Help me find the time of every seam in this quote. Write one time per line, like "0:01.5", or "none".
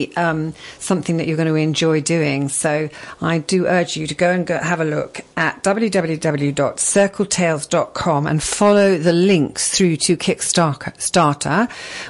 none